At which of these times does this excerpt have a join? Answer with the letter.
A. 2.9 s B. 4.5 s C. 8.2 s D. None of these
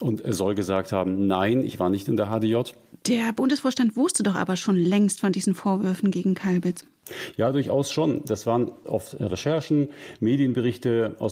A